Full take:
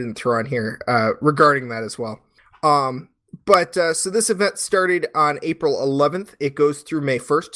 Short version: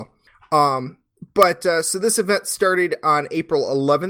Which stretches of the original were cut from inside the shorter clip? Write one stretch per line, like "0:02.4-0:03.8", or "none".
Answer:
none